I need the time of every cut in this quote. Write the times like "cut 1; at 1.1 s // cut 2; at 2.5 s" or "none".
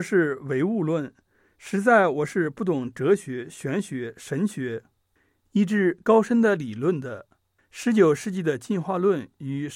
cut 1; at 7.6 s

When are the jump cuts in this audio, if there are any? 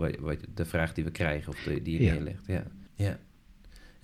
cut 1; at 2.9 s

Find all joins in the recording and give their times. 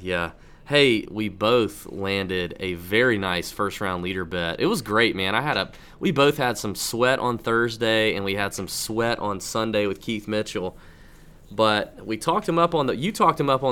cut 1; at 1.1 s

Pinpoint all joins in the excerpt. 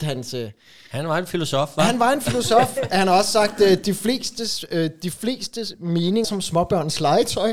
cut 1; at 6.2 s

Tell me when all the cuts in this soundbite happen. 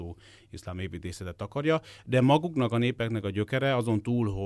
none

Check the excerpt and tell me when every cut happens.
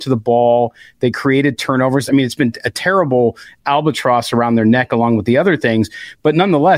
cut 1; at 2.1 s

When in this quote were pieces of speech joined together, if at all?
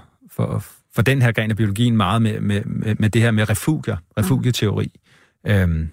none

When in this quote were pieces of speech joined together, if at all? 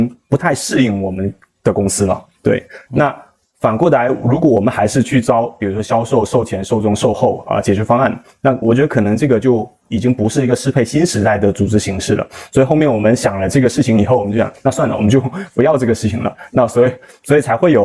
cut 1; at 8.6 s

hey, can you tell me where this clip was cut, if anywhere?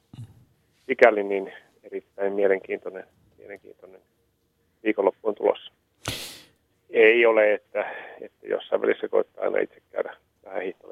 cut 1; at 6.7 s

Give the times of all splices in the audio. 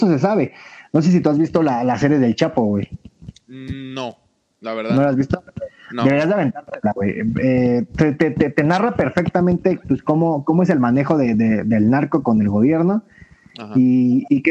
none

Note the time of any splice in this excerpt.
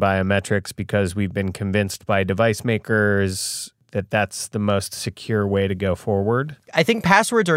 cut 1; at 6.7 s

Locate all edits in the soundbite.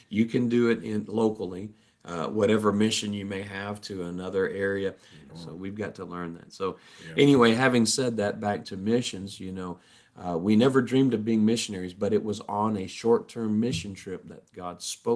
cut 1; at 5.3 s

